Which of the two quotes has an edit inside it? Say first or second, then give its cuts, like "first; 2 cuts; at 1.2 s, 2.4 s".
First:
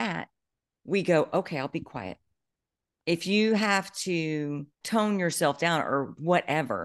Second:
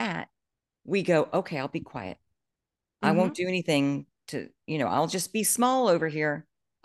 first; 2 cuts; at 3.0 s, 4.7 s